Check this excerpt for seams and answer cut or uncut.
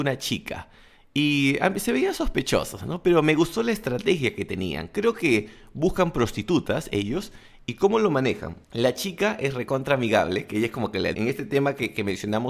cut